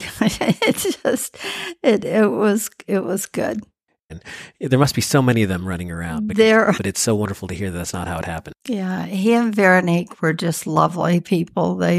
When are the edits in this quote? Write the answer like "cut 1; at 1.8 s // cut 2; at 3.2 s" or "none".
cut 1; at 4.1 s // cut 2; at 6.7 s